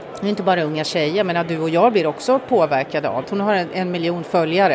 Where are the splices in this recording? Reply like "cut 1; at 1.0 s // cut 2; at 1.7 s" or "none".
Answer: cut 1; at 3.2 s